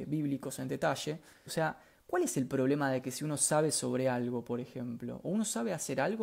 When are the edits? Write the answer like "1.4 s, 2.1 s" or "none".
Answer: 1.5 s